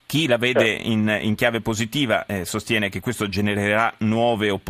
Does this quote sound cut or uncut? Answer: uncut